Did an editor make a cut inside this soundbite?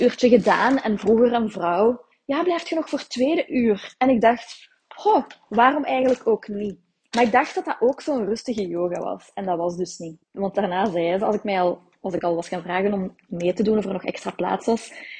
yes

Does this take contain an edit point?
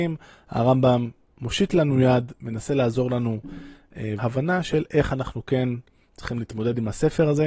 yes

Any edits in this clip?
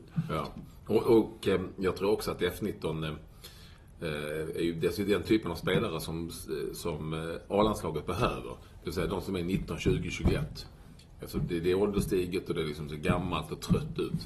no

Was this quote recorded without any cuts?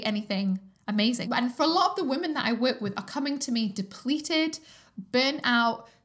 no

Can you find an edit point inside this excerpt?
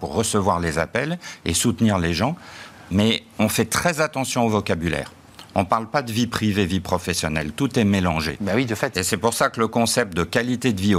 no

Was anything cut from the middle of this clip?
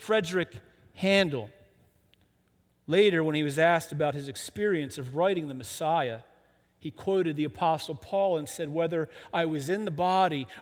no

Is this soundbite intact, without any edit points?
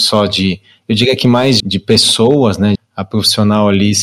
no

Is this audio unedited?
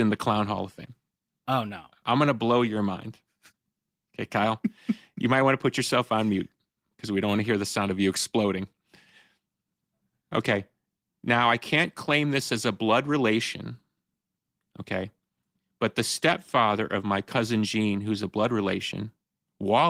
no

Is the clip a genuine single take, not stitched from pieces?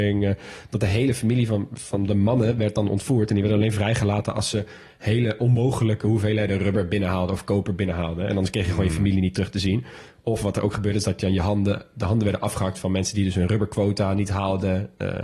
yes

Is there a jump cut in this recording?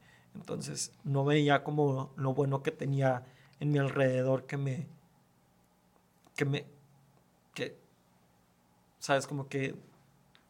no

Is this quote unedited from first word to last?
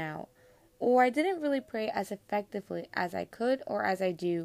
yes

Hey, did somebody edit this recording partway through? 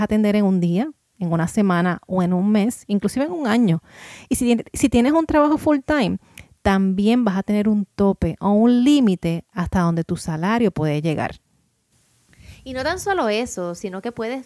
no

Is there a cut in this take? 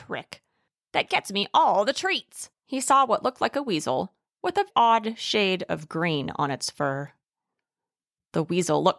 yes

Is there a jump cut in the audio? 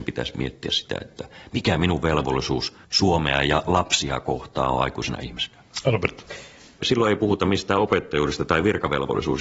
yes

